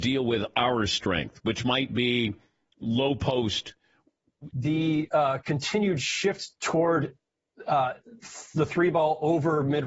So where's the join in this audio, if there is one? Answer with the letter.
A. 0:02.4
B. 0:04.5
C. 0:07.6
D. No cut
B